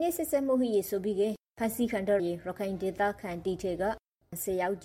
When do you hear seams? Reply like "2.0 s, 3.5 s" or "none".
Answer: 2.2 s